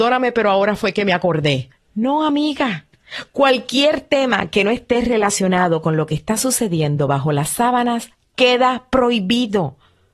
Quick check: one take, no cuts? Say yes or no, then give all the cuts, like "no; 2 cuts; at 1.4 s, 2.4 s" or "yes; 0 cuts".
yes; 0 cuts